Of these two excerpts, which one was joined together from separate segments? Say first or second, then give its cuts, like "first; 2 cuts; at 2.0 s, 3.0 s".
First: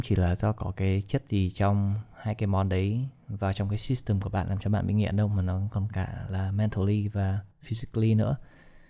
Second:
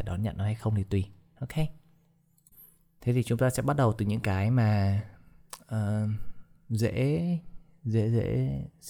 first; 1 cut; at 7.5 s